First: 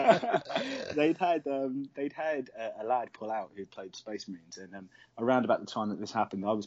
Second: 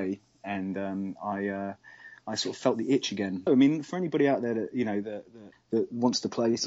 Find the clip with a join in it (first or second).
second